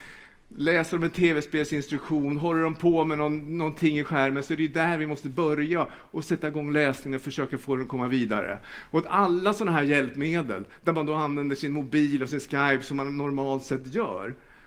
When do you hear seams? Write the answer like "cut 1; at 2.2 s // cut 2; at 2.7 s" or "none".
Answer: none

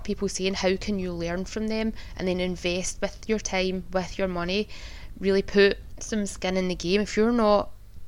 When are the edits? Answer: none

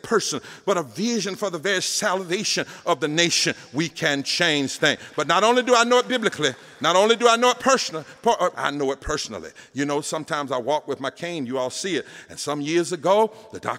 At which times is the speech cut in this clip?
cut 1; at 8.5 s

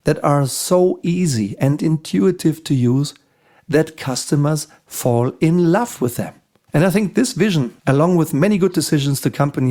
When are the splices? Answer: cut 1; at 6.7 s // cut 2; at 7.8 s

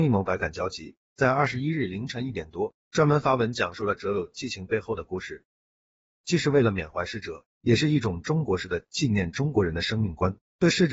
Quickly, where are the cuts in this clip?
none

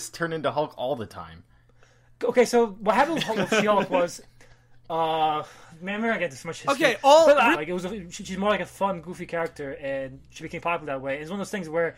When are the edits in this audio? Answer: cut 1; at 7.5 s

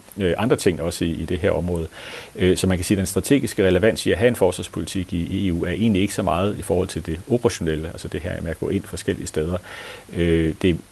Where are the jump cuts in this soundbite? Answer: none

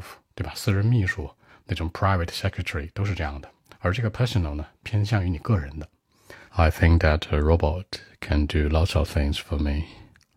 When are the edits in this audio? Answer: cut 1; at 6.5 s

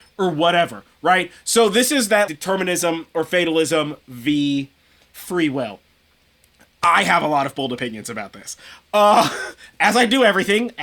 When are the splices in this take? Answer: cut 1; at 2.3 s

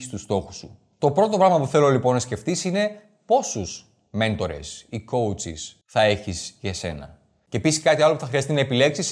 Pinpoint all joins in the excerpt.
cut 1; at 5.8 s // cut 2; at 7.5 s

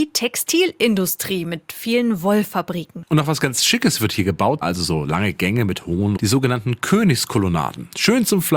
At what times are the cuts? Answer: cut 1; at 4.6 s // cut 2; at 6.2 s

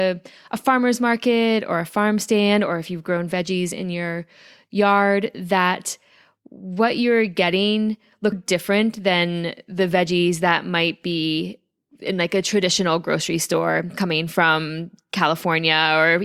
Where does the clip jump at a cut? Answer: cut 1; at 8.3 s

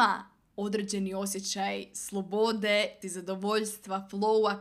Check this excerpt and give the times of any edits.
cut 1; at 3.0 s

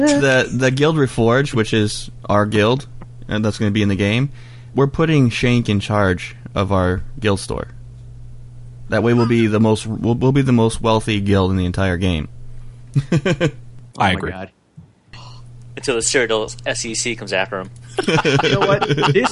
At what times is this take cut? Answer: cut 1; at 4.7 s // cut 2; at 13.9 s

